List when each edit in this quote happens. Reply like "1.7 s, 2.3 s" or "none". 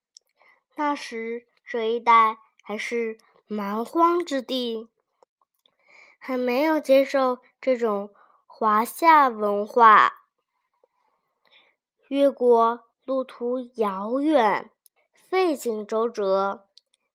15.0 s